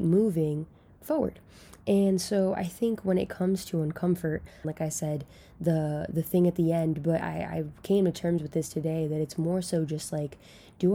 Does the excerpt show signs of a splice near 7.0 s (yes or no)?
no